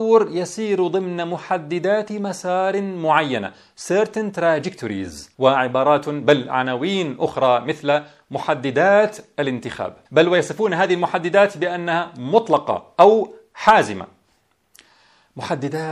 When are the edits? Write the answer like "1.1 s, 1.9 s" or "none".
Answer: 5.3 s, 10.0 s